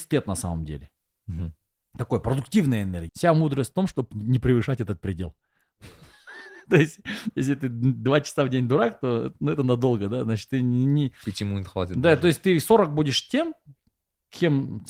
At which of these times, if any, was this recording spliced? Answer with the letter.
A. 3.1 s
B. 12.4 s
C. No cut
A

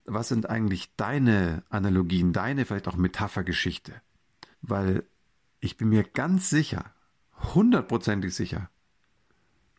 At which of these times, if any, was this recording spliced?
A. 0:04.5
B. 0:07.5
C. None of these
A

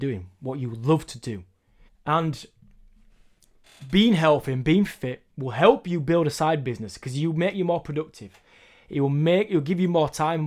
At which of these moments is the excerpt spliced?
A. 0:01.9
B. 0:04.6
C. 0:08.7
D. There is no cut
A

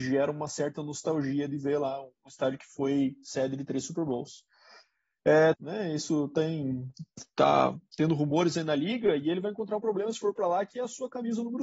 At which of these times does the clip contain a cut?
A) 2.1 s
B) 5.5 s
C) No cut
B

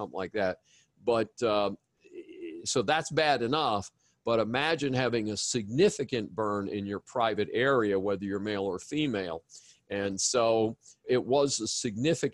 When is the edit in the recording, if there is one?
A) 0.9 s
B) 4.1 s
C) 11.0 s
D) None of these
C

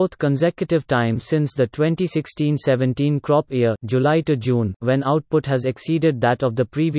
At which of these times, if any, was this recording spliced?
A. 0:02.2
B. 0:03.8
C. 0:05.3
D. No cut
D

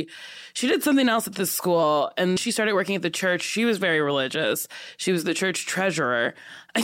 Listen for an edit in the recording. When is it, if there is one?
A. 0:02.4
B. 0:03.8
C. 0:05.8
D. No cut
A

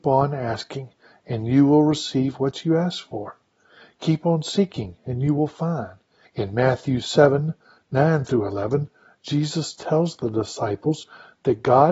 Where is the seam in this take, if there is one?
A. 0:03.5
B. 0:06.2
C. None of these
B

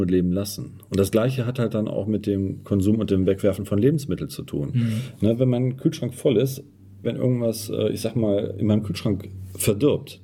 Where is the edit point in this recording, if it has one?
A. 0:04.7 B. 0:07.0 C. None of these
B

